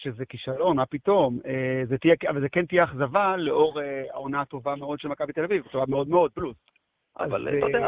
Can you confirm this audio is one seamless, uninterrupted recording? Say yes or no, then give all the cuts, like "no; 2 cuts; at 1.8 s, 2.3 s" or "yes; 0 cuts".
no; 1 cut; at 6.1 s